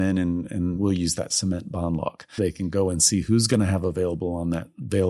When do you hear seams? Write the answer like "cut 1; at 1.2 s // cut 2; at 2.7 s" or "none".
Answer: cut 1; at 2.4 s